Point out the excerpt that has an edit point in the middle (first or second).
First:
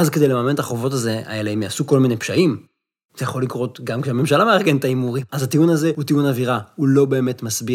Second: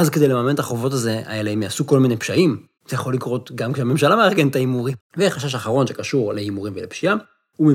second